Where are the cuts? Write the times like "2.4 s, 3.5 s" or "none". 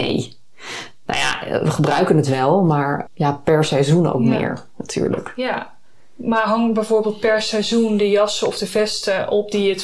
3.1 s